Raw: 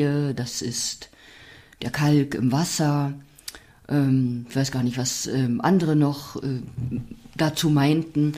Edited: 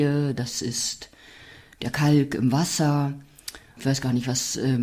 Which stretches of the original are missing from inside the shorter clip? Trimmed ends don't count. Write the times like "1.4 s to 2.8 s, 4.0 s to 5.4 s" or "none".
3.8 s to 4.5 s